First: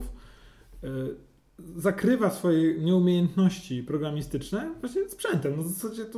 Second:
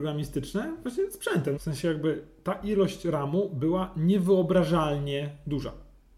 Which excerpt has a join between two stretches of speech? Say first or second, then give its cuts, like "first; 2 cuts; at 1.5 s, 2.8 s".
second; 1 cut; at 1.6 s